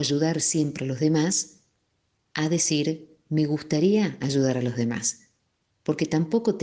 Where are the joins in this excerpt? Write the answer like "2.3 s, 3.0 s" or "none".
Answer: none